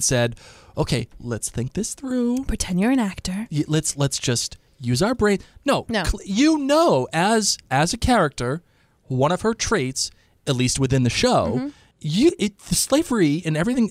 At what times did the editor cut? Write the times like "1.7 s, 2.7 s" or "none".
11.9 s